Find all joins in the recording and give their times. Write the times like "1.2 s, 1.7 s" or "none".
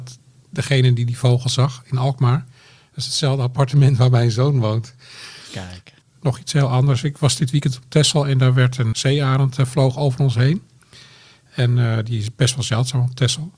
6.0 s, 8.9 s